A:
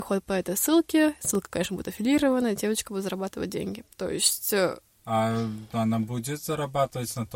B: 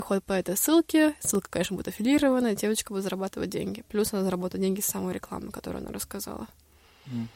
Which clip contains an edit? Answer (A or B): A